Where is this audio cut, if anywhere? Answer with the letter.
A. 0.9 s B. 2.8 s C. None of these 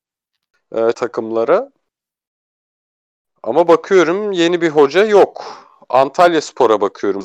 A